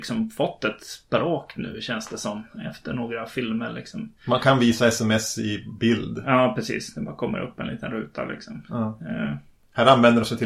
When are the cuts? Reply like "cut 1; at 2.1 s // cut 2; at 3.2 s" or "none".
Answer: none